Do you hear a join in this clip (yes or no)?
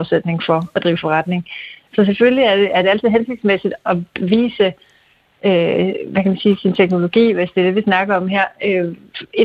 yes